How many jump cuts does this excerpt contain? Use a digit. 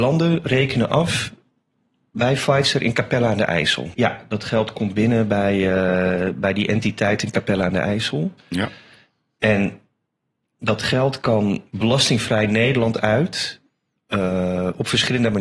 1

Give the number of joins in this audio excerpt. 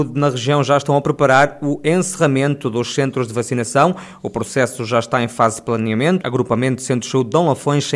1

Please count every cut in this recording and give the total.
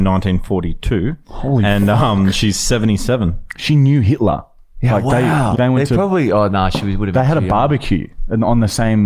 1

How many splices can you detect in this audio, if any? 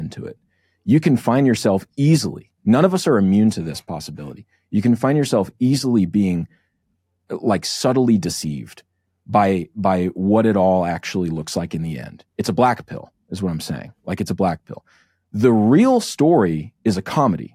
0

